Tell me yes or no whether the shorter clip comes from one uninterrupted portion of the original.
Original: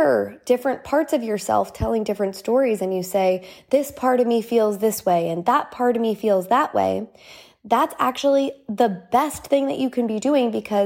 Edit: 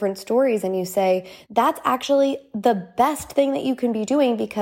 no